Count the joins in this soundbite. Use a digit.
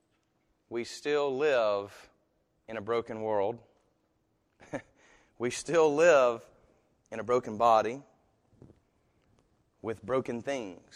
0